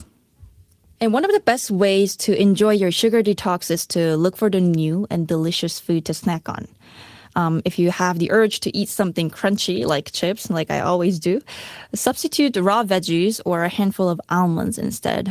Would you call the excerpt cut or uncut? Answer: uncut